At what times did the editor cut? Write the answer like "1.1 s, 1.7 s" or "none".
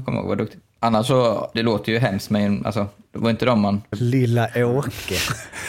1.5 s, 3.9 s